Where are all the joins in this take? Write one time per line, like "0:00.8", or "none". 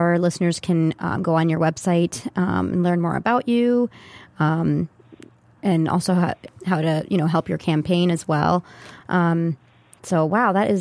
0:06.5
0:09.0